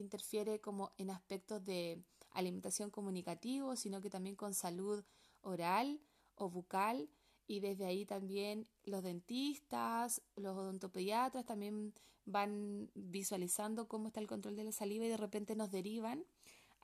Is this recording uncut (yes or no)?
yes